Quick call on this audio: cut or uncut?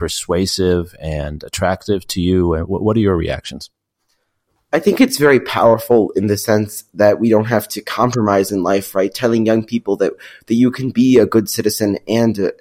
uncut